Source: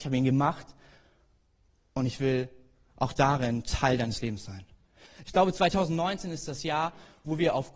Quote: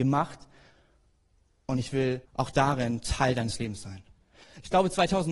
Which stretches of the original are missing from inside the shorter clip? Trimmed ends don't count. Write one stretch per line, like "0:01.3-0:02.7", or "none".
0:02.5-0:02.9